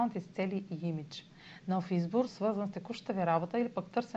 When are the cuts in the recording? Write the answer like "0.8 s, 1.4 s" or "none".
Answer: 2.3 s